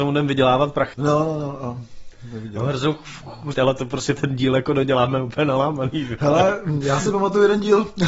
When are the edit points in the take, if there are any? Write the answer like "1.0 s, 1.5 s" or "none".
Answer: 0.9 s, 3.5 s